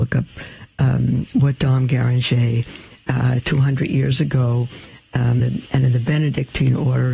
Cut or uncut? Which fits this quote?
cut